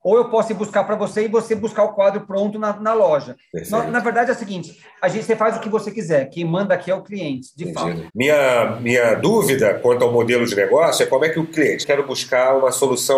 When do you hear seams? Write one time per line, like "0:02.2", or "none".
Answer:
0:08.1
0:11.8